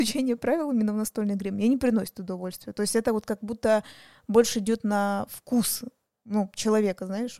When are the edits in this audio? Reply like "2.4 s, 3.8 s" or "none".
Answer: none